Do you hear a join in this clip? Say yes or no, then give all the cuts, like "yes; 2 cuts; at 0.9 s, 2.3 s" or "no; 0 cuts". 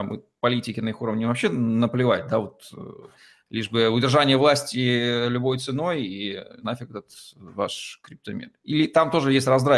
no; 0 cuts